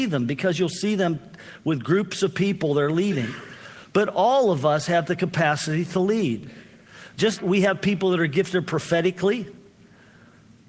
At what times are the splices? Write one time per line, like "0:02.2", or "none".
0:07.4